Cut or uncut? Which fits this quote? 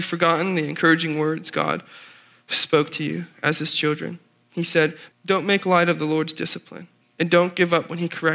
cut